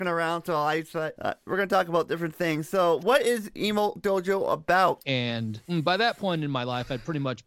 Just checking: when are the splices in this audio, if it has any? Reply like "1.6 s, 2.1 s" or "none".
3.0 s, 5.0 s